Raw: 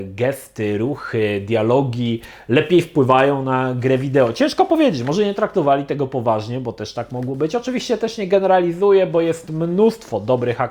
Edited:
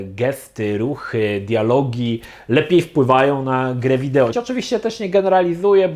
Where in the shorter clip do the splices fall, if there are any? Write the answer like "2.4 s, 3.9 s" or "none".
4.3 s